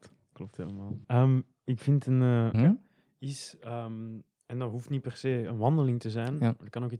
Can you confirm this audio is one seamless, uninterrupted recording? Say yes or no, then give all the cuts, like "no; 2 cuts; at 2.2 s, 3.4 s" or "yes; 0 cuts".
no; 2 cuts; at 1.0 s, 2.5 s